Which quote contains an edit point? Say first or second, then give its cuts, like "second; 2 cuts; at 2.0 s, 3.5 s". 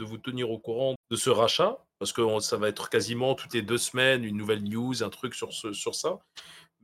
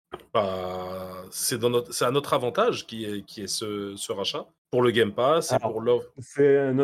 first; 1 cut; at 1.0 s